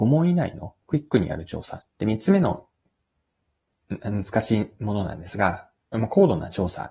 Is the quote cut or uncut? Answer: cut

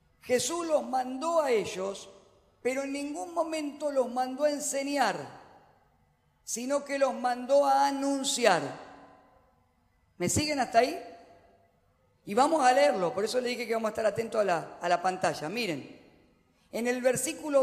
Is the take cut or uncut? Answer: uncut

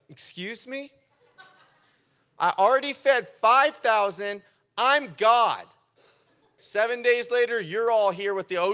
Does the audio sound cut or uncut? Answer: cut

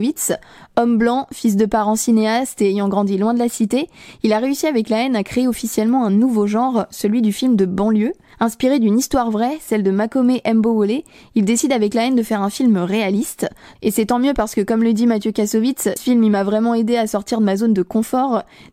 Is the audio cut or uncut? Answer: cut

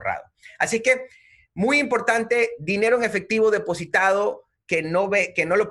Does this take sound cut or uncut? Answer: uncut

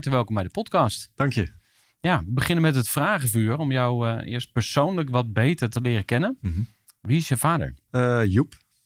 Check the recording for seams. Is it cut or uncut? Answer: uncut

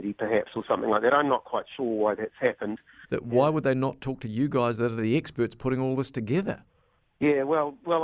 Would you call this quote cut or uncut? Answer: cut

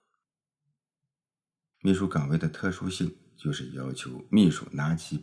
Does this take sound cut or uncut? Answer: cut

